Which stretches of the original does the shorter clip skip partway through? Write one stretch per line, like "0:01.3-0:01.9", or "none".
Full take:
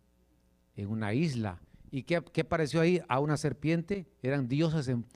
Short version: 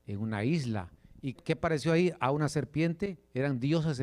0:02.0-0:02.2